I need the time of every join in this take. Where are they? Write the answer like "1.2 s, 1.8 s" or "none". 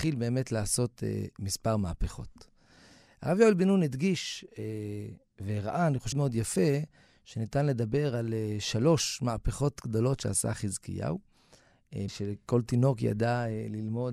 6.1 s, 12.1 s